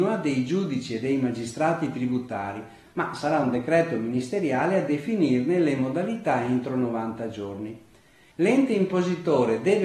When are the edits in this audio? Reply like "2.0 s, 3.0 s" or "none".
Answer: 8.3 s